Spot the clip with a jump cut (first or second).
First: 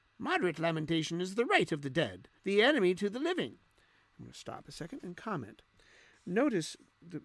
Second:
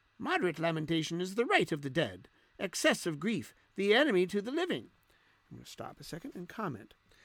first